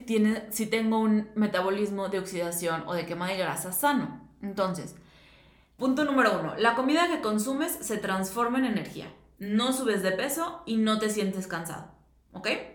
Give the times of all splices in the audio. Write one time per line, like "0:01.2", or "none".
0:05.8